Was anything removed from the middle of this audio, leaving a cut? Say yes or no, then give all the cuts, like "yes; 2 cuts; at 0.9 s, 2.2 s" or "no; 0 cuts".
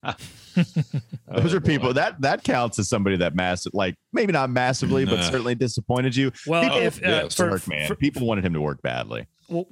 no; 0 cuts